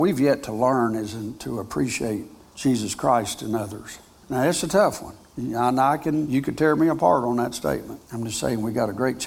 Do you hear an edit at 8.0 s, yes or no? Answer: yes